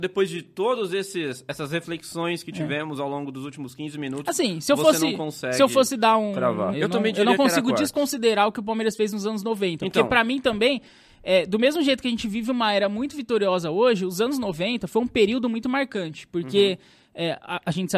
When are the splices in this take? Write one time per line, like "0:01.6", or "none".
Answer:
0:06.7